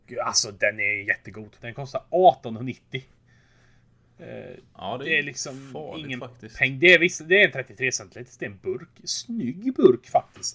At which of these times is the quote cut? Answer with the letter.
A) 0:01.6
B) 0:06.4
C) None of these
A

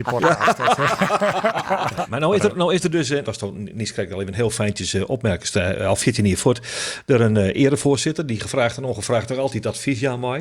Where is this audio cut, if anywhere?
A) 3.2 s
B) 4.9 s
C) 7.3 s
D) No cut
A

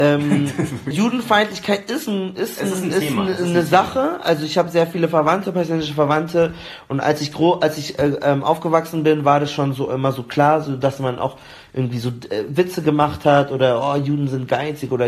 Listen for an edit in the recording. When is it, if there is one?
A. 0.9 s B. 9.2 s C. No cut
A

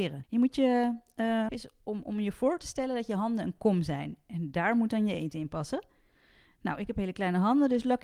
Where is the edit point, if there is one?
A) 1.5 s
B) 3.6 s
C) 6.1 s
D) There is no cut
A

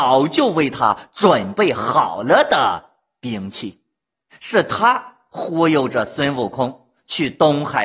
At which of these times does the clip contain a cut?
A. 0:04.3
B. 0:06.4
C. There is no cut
A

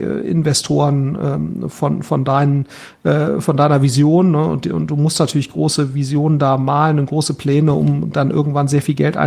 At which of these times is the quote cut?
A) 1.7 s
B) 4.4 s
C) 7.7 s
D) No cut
D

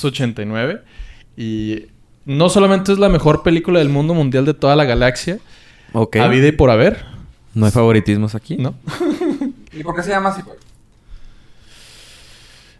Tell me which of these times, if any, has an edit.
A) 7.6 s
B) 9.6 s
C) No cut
B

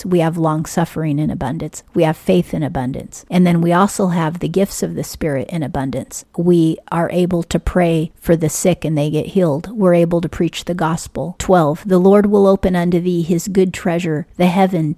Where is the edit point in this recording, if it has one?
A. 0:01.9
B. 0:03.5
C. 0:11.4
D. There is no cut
C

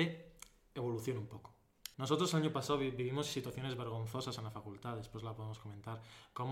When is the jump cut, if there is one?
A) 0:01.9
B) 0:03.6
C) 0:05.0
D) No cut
A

